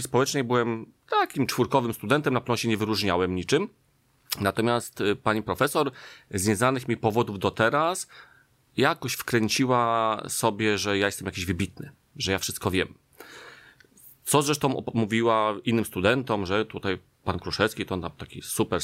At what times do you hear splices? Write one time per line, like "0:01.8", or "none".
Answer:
none